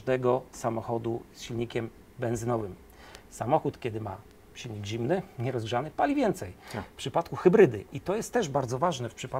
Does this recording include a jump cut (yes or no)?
no